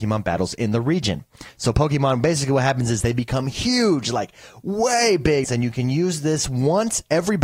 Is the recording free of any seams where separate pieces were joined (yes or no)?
no